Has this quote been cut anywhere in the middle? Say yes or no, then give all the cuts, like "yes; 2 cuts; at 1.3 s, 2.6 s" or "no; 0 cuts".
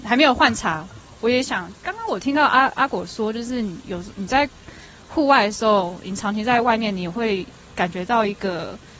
no; 0 cuts